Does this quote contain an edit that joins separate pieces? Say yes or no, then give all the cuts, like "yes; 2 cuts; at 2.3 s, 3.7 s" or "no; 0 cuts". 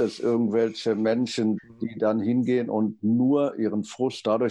yes; 1 cut; at 1.6 s